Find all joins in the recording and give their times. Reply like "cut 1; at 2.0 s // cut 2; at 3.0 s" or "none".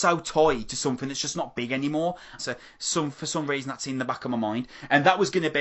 cut 1; at 2.4 s